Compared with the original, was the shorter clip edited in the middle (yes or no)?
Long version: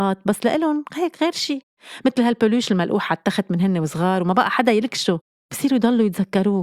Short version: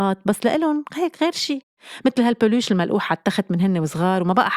no